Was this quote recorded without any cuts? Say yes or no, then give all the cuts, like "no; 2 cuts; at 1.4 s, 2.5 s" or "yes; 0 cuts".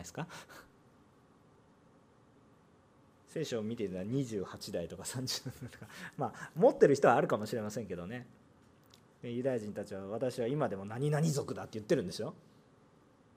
yes; 0 cuts